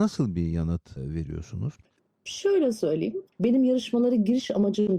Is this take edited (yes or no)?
yes